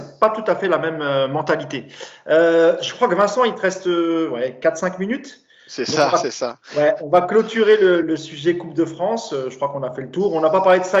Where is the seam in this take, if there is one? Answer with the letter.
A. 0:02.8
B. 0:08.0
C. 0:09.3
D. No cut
B